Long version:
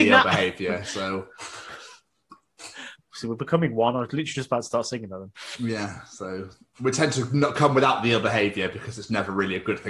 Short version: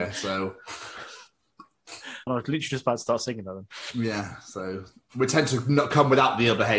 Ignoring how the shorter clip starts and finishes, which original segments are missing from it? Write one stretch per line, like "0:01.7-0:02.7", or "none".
0:03.0-0:03.9